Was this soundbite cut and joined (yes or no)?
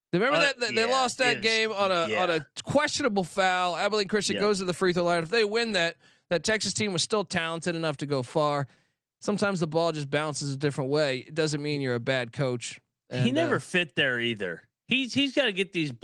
no